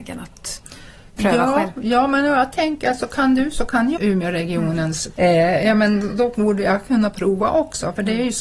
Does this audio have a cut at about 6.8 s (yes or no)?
no